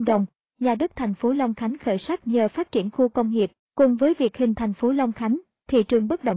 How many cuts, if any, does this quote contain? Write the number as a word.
one